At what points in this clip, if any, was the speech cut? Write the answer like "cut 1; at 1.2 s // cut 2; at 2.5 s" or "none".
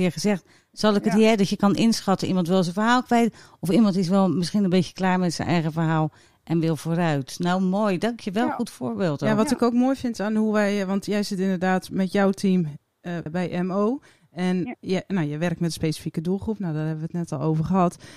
cut 1; at 13.3 s